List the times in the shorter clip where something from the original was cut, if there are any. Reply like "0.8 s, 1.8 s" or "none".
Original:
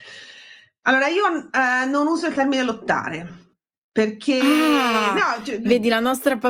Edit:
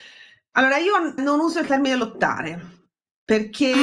1.2 s